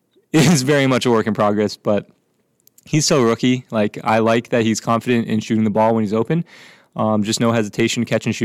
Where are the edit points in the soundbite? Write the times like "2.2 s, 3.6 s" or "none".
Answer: none